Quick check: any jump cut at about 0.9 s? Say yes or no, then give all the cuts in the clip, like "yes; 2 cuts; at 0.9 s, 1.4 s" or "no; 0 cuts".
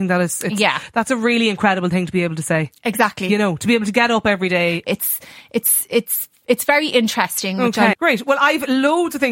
no; 2 cuts; at 4.8 s, 7.9 s